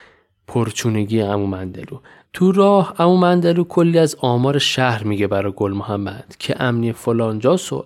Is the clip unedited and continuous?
no; 1 cut; at 2.2 s

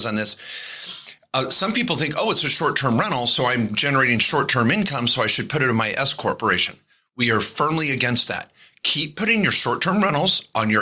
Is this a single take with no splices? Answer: yes; 0 cuts

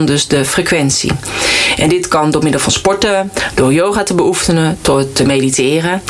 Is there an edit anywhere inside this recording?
no; 0 cuts

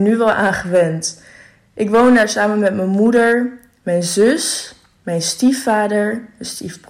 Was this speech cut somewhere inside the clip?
no; 0 cuts

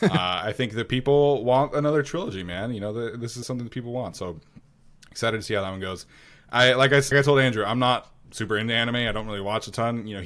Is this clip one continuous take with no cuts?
no; 2 cuts; at 3.4 s, 7.1 s

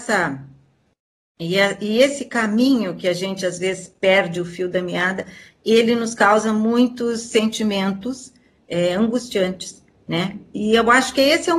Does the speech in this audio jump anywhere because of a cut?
no; 0 cuts

